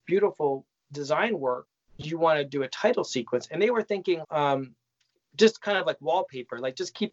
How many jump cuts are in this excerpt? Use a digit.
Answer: 1